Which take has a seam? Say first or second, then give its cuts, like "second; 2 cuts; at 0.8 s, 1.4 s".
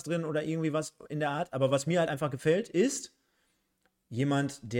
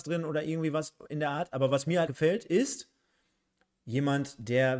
second; 1 cut; at 2.1 s